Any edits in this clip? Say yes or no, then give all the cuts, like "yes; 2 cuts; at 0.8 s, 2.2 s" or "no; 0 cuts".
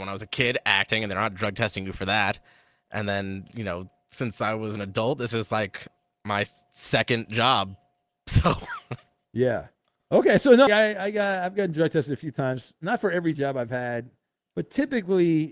yes; 1 cut; at 10.7 s